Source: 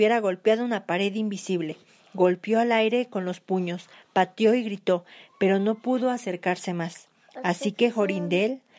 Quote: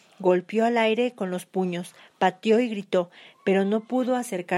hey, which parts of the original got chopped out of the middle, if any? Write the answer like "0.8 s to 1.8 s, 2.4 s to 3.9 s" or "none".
none